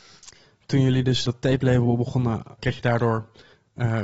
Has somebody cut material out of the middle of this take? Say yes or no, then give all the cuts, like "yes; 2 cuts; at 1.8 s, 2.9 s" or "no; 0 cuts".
yes; 2 cuts; at 1.3 s, 2.6 s